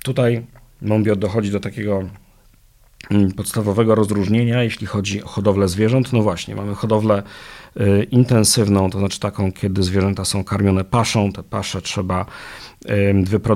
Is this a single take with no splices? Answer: no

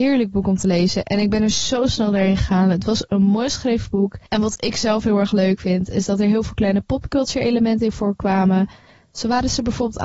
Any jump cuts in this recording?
no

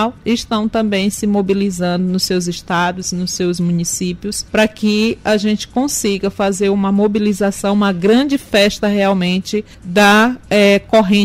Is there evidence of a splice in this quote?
yes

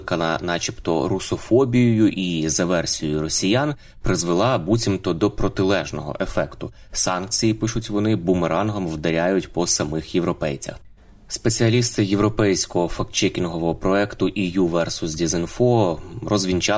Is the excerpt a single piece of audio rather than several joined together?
yes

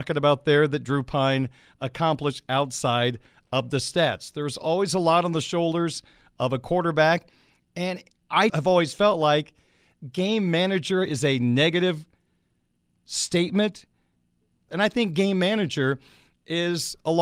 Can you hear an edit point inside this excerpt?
yes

